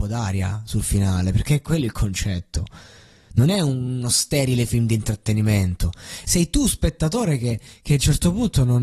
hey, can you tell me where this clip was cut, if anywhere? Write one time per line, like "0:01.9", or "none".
0:06.2